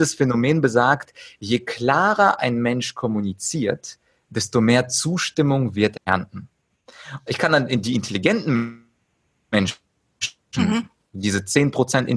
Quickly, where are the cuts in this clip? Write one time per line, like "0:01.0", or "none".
0:05.9
0:07.3